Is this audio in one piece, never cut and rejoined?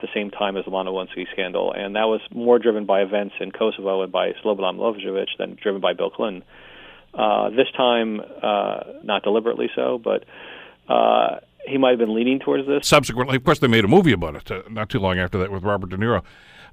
no; 2 cuts; at 9.0 s, 12.8 s

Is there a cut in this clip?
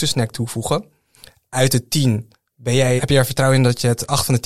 yes; 1 cut; at 3.0 s

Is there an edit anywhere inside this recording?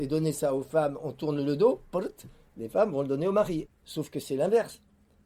yes; 1 cut; at 3.7 s

